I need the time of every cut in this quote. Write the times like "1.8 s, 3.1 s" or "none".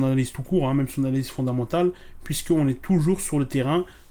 none